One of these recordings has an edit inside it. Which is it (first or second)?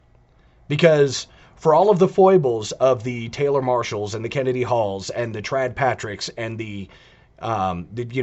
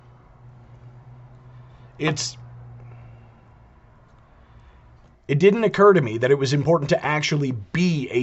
second